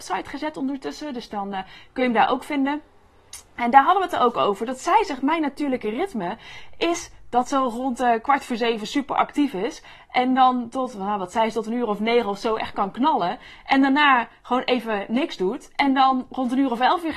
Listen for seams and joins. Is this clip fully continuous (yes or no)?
yes